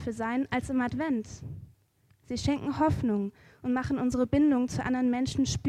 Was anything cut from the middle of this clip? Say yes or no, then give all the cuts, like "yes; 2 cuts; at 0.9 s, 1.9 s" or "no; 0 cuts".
yes; 1 cut; at 2.1 s